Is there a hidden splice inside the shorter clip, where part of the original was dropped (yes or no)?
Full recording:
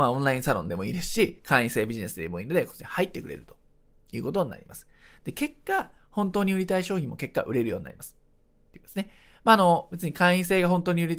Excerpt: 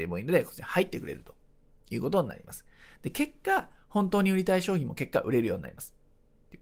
no